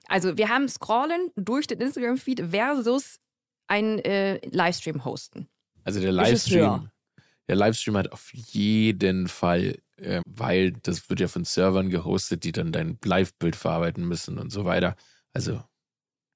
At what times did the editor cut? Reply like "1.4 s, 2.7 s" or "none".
10.2 s